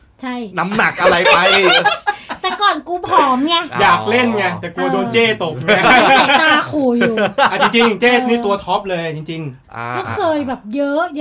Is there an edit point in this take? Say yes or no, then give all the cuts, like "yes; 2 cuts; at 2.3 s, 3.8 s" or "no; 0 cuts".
yes; 1 cut; at 1.8 s